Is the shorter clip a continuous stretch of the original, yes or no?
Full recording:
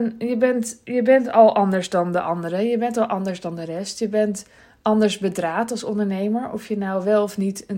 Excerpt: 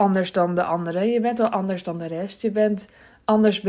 yes